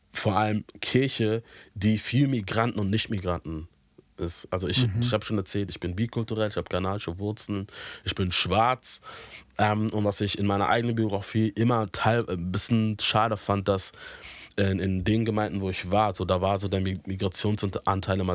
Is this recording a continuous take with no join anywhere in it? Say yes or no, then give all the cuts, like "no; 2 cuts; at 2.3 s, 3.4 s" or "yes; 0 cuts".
yes; 0 cuts